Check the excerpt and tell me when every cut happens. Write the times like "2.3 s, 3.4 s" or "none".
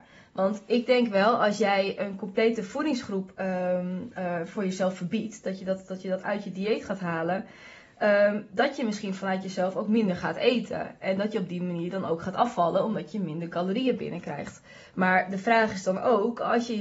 none